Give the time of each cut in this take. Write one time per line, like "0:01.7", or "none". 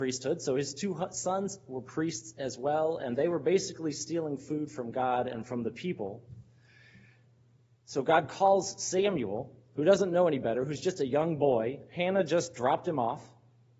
none